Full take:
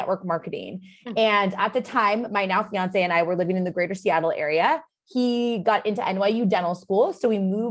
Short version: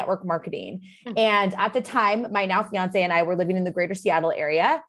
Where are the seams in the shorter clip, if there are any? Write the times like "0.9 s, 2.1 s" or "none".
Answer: none